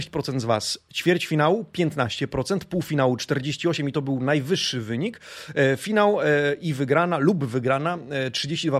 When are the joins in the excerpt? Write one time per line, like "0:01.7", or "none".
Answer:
none